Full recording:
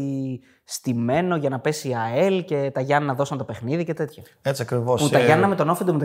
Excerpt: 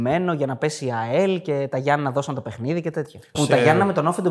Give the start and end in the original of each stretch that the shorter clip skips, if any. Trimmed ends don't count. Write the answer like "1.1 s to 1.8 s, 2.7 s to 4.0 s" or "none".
4.4 s to 5.0 s